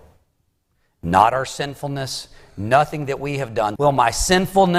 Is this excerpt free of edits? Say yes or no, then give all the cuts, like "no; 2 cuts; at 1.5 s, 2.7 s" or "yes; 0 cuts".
no; 1 cut; at 3.8 s